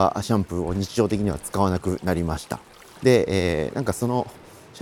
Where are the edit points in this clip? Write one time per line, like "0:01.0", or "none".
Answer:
0:03.0